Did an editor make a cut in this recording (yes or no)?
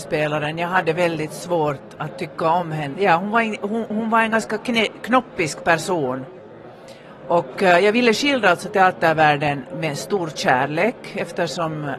yes